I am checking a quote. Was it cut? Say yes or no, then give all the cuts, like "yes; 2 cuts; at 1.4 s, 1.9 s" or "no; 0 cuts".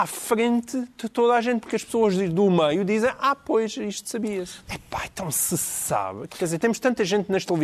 yes; 2 cuts; at 4.7 s, 6.3 s